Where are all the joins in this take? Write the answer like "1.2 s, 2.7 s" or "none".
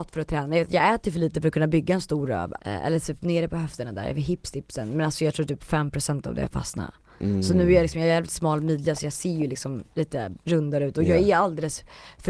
2.6 s